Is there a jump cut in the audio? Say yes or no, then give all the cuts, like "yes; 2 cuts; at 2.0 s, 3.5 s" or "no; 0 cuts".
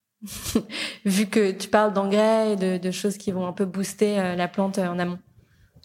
no; 0 cuts